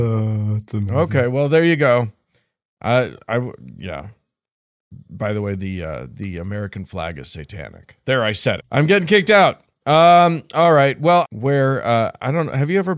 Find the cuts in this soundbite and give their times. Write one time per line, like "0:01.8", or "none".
0:08.6
0:11.2